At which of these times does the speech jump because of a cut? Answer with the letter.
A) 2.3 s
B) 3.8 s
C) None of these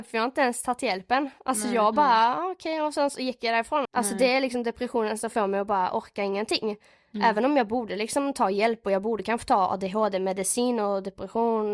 B